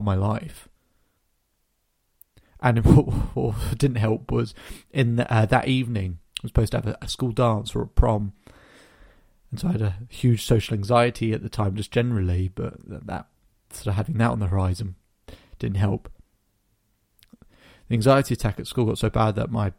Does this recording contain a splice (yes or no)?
no